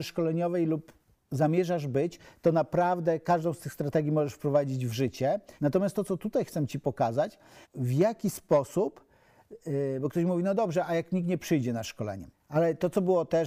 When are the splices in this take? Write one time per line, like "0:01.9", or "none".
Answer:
0:05.6
0:07.6
0:12.3